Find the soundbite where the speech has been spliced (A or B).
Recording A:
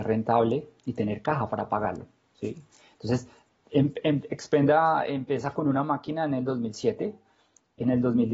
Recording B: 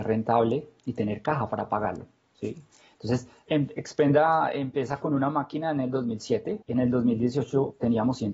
B